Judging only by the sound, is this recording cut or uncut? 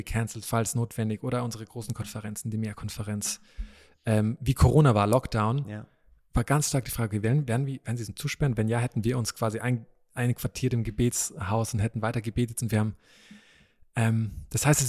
uncut